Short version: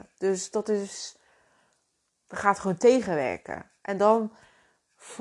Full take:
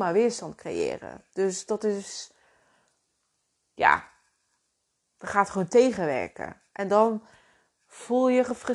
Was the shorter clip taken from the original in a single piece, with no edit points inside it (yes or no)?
no